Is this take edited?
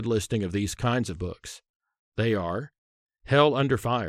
no; 0 cuts

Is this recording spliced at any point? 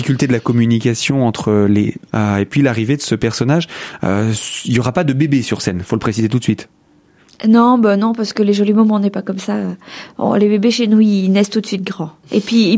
yes; 1 cut; at 2.1 s

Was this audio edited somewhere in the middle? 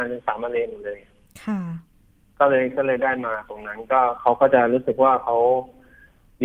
no; 0 cuts

